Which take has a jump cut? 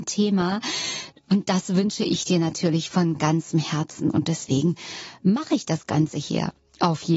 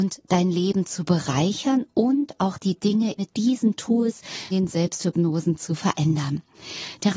second; 2 cuts; at 3.2 s, 4.5 s

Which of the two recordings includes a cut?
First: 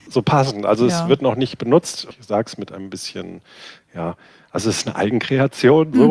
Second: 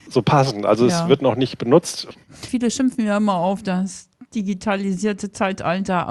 second; 1 cut; at 2.1 s

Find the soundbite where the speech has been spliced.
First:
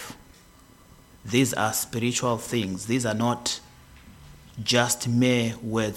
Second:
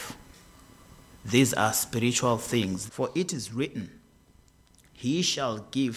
second; 1 cut; at 2.9 s

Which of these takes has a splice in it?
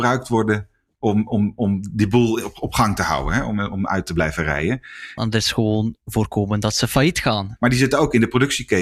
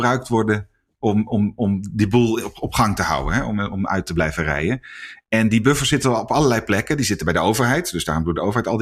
first; 2 cuts; at 5.2 s, 7.6 s

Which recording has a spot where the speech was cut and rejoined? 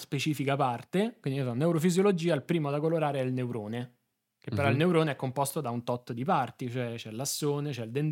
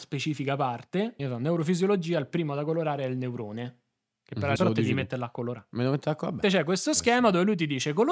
second; 3 cuts; at 1.2 s, 4.6 s, 6.4 s

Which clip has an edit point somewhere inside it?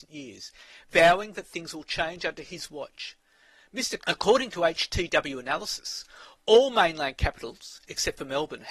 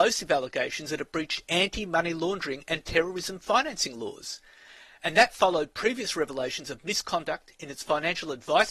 first; 1 cut; at 4.0 s

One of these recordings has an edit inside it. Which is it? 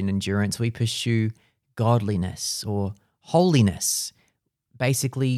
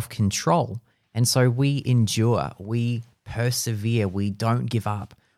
second; 1 cut; at 1.0 s

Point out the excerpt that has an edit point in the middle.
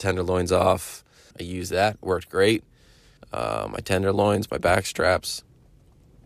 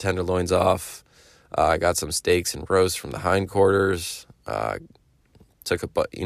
first; 2 cuts; at 1.3 s, 3.2 s

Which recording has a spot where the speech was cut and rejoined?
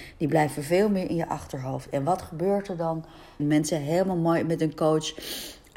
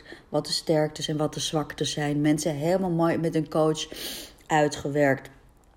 first; 1 cut; at 3.4 s

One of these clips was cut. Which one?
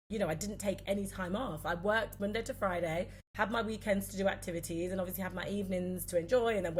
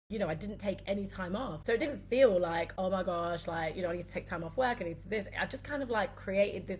second; 1 cut; at 1.6 s

